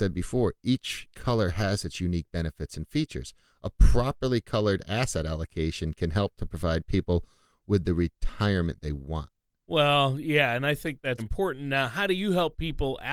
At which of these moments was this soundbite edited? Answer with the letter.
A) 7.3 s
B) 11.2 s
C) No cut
B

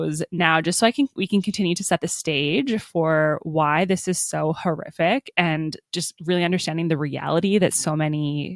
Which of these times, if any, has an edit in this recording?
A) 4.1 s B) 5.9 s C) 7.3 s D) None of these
B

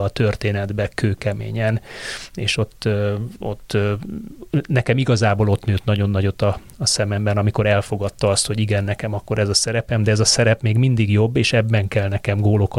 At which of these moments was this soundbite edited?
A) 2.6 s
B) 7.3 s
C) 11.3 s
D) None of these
D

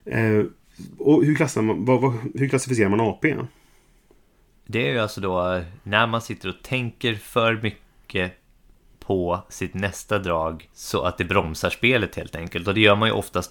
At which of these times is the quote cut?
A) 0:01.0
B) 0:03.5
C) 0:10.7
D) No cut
C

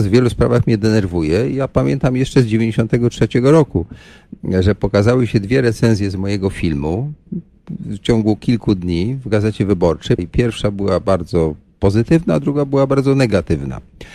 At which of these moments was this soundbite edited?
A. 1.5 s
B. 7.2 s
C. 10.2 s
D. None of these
C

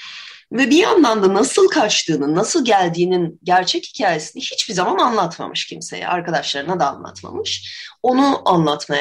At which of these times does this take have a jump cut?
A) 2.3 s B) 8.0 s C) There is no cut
C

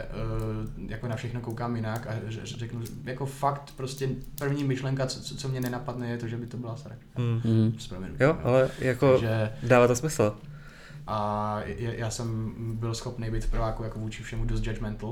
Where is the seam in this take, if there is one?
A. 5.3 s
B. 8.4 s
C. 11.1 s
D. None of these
C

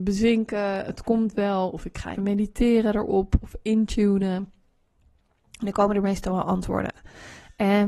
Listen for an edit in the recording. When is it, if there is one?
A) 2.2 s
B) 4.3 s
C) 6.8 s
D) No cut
A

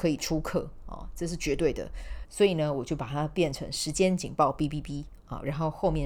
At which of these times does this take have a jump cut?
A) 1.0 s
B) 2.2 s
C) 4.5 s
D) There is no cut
B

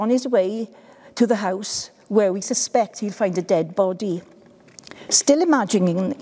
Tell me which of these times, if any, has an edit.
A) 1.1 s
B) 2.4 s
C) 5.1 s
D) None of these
B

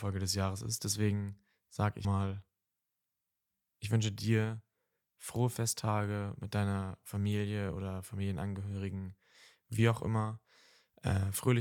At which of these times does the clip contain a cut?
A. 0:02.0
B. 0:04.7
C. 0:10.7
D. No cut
A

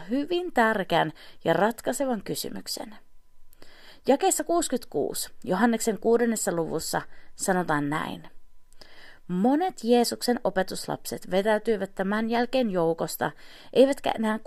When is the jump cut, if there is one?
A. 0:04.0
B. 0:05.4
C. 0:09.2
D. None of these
D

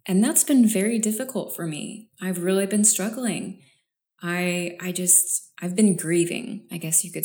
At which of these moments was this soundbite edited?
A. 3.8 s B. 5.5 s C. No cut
B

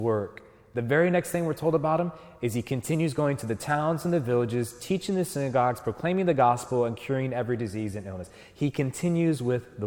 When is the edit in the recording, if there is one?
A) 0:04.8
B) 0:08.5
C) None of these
C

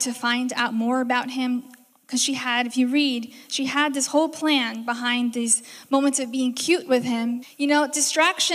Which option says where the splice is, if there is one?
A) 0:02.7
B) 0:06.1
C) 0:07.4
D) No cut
C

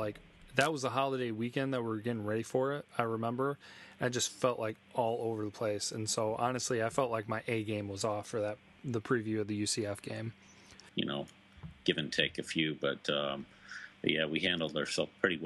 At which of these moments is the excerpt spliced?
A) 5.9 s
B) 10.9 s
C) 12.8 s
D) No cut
B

